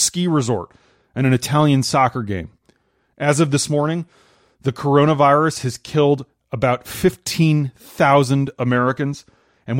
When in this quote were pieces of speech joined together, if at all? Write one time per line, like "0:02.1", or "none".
none